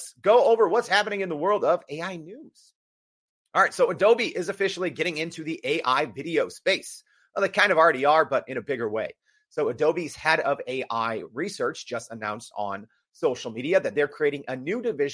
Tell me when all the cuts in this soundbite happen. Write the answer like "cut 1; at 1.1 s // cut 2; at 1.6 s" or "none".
none